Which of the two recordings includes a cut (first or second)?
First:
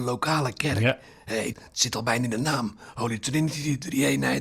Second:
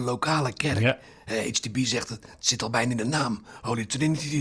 first